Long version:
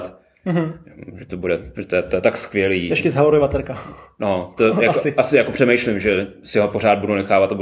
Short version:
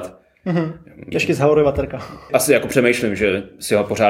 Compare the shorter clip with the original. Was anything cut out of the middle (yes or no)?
yes